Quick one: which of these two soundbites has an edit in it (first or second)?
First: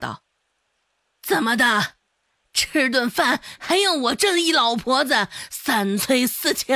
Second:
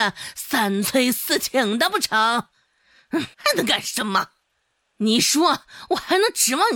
second